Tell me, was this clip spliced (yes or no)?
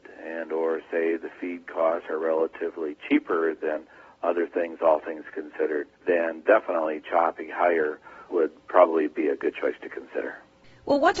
yes